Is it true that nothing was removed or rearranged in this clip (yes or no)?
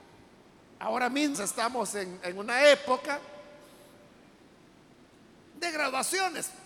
no